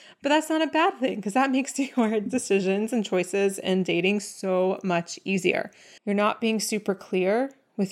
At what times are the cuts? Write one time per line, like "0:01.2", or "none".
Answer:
0:06.0